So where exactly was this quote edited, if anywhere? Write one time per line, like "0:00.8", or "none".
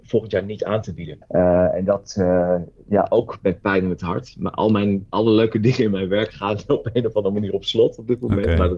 0:01.2